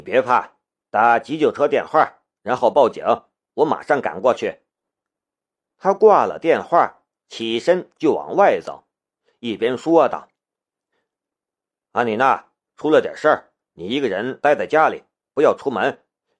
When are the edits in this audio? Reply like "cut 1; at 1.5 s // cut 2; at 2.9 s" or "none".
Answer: none